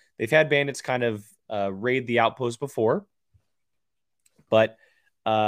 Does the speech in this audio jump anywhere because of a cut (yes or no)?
no